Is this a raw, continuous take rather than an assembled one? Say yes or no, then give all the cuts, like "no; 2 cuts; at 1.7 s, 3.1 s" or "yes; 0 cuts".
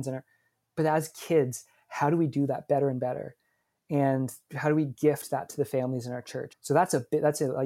no; 1 cut; at 6.5 s